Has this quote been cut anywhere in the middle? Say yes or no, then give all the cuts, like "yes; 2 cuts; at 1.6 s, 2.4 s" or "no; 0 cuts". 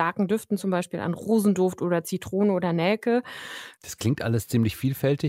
yes; 1 cut; at 3.8 s